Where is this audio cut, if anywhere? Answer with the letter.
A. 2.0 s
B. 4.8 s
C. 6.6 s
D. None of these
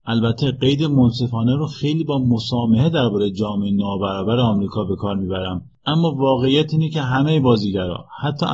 D